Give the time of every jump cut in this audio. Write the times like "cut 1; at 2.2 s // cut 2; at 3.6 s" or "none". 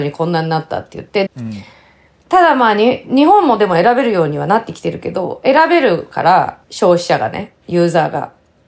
cut 1; at 1.3 s // cut 2; at 6.6 s